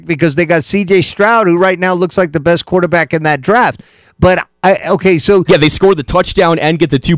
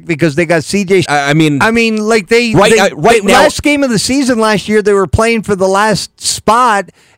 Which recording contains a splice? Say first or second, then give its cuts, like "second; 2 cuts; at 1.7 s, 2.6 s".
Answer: second; 1 cut; at 1.1 s